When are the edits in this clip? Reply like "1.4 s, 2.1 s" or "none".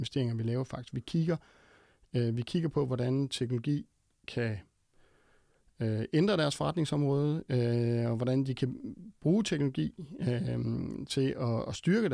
none